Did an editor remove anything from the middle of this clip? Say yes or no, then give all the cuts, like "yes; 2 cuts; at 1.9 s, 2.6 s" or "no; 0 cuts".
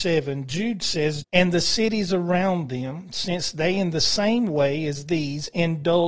yes; 1 cut; at 1.2 s